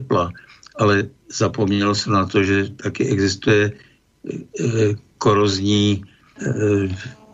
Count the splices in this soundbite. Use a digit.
1